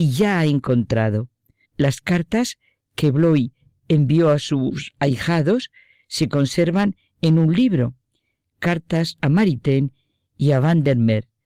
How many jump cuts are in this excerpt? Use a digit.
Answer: 1